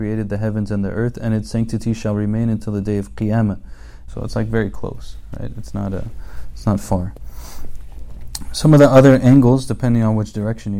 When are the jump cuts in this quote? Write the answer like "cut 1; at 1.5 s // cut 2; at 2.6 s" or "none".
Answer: cut 1; at 4.1 s